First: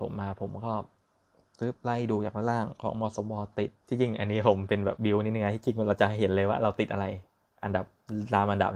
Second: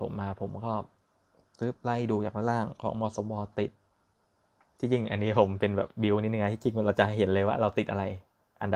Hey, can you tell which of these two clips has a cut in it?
first; 2 cuts; at 3.8 s, 5.0 s

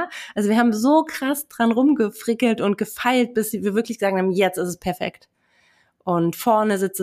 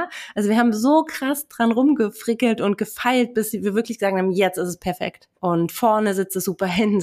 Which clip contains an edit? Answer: second; 1 cut; at 5.4 s

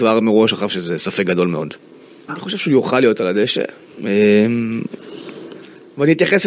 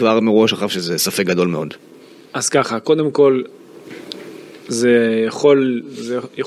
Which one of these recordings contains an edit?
first; 1 cut; at 2.3 s

